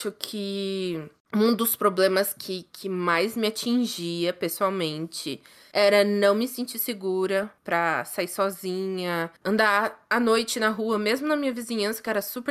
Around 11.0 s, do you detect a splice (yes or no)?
no